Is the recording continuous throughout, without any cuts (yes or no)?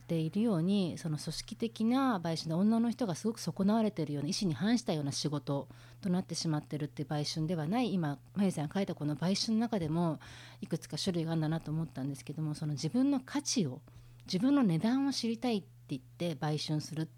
no